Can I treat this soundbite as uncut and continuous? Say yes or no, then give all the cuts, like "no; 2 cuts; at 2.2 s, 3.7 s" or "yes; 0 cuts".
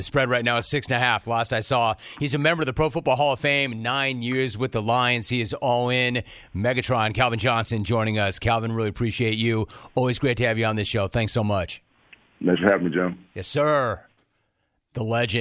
yes; 0 cuts